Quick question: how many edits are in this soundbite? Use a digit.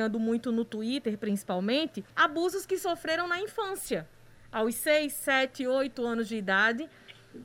1